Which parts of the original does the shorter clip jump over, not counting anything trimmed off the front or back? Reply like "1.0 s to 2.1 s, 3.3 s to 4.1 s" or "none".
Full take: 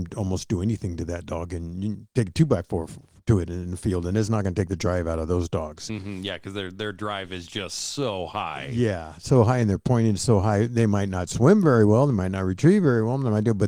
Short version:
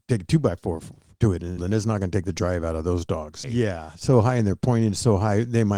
3.6 s to 4.0 s, 5.9 s to 8.7 s